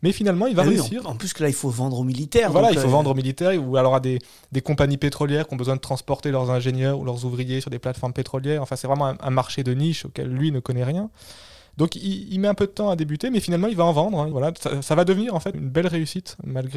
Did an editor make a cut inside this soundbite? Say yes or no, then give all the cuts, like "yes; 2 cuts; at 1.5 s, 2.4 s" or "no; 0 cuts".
yes; 2 cuts; at 14.3 s, 15.5 s